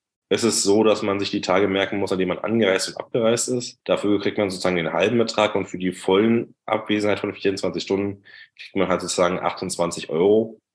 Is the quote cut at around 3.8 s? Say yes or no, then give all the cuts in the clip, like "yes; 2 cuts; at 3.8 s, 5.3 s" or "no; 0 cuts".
no; 0 cuts